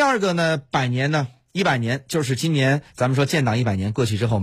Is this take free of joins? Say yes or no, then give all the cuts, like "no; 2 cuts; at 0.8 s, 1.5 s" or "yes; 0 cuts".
yes; 0 cuts